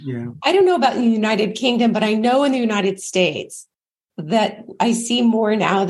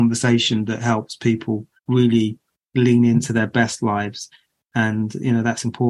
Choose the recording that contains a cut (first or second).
second